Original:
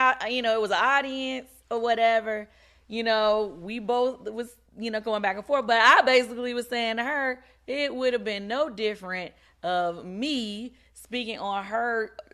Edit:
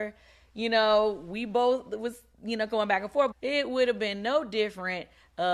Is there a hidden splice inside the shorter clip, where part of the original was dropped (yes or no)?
yes